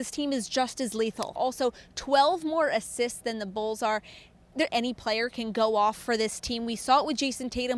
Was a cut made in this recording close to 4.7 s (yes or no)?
yes